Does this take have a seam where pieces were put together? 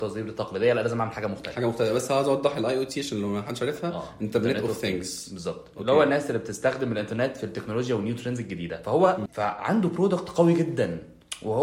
yes; 1 cut; at 9.3 s

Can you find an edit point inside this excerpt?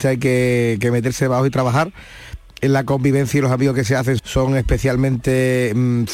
yes; 1 cut; at 4.2 s

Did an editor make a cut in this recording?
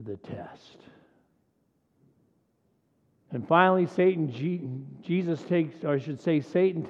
no; 0 cuts

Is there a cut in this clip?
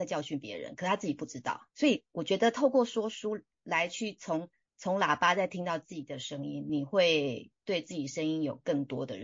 no; 0 cuts

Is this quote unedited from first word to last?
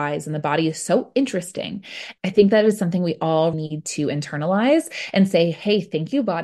no; 2 cuts; at 2.2 s, 3.5 s

